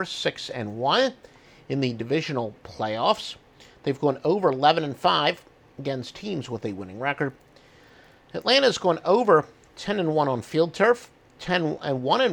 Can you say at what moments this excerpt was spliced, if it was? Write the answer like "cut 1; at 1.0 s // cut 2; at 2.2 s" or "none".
none